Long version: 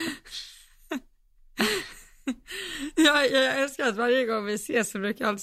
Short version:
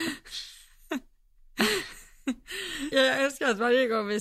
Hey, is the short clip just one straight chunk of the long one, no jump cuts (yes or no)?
no